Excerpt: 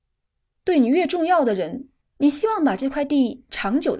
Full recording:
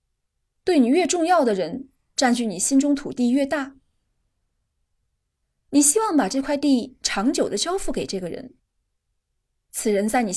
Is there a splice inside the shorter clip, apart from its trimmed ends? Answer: yes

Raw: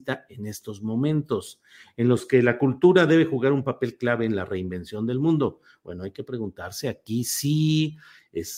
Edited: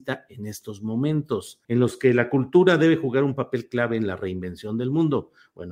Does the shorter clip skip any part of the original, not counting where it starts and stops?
yes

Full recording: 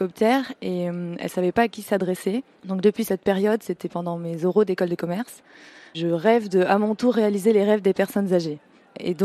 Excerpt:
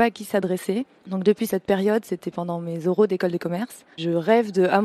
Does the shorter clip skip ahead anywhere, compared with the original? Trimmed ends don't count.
yes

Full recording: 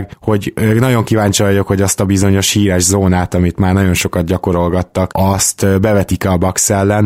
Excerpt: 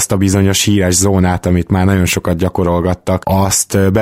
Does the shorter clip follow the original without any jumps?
yes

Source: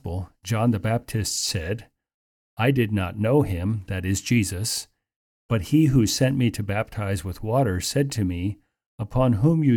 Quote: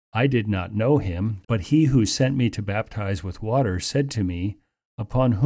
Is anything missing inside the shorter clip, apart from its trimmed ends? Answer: yes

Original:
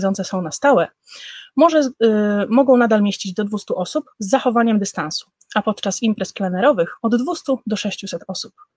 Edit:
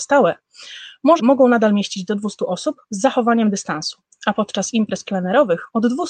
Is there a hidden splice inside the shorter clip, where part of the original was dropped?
yes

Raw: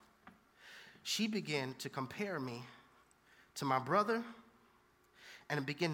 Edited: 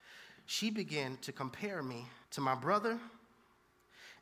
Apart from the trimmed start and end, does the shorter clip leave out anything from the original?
yes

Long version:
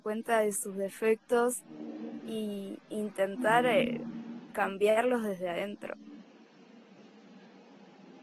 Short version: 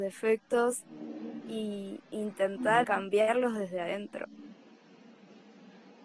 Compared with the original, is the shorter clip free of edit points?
no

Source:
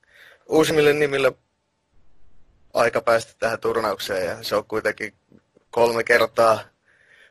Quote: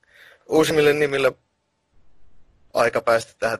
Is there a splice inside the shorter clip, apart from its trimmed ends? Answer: no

